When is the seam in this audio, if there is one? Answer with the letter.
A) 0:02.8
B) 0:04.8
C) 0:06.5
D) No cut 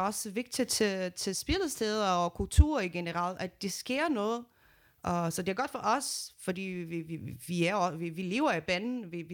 D